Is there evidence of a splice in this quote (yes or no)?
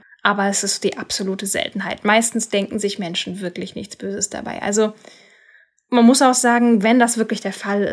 no